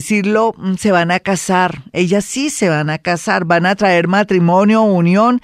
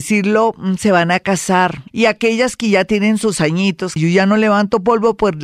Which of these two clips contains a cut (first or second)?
second